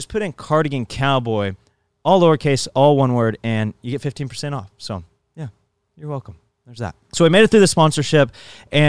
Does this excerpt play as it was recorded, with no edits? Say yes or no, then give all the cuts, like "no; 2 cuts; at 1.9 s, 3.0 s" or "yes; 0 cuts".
no; 1 cut; at 7.0 s